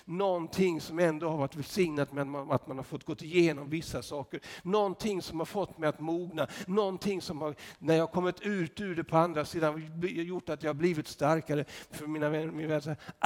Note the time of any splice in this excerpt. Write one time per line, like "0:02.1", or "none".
none